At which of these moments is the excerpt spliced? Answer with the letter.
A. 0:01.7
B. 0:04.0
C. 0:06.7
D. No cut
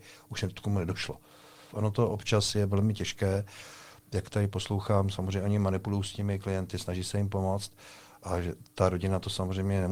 A